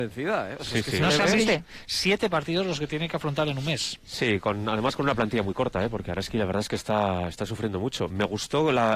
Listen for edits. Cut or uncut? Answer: cut